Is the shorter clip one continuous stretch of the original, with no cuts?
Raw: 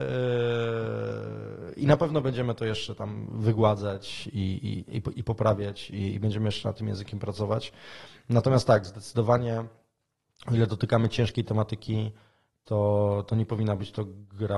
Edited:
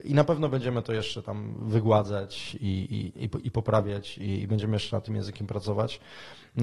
yes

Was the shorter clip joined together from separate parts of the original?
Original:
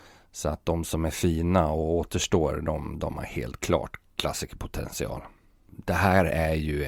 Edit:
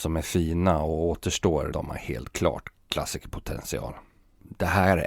yes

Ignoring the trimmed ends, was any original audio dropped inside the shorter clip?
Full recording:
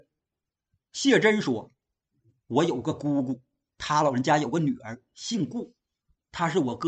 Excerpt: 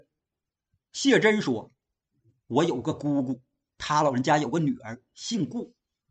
no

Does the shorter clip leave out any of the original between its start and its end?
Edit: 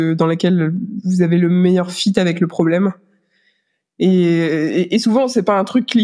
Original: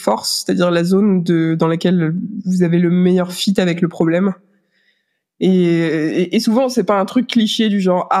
no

